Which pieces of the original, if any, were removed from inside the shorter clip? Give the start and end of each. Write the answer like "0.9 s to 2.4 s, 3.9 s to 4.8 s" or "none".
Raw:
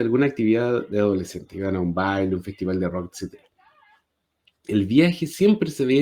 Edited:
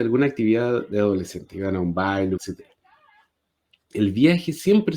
2.4 s to 3.1 s